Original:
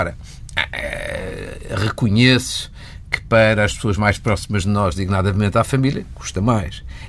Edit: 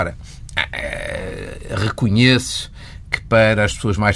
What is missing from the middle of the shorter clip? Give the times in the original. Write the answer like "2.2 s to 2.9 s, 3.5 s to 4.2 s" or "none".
none